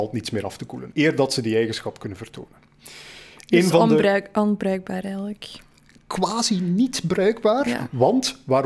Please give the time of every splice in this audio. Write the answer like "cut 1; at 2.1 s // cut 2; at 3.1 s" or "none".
cut 1; at 0.9 s